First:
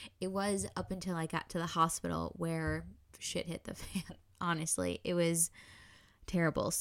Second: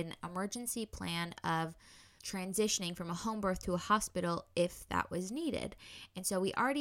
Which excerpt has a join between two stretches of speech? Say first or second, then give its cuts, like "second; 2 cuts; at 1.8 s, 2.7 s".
second; 1 cut; at 2.2 s